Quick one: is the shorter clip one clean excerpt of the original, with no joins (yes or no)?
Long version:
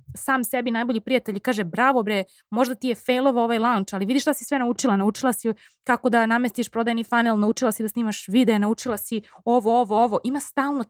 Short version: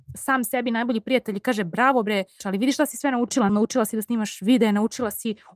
no